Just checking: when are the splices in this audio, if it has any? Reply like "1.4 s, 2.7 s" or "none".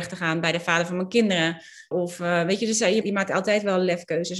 1.9 s, 3.0 s